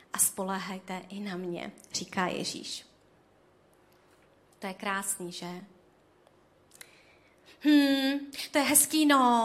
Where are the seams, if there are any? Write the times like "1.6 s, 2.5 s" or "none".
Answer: none